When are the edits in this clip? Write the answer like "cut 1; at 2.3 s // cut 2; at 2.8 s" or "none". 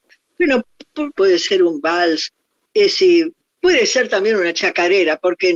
cut 1; at 1.2 s